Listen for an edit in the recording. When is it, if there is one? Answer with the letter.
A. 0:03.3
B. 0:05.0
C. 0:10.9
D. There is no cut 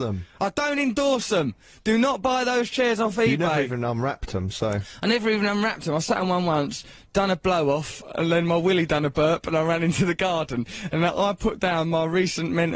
D